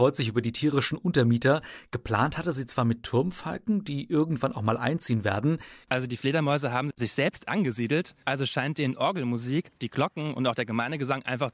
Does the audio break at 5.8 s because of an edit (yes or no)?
yes